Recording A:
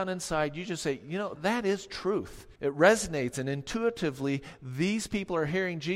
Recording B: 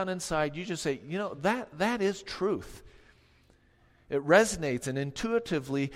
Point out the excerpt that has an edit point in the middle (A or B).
A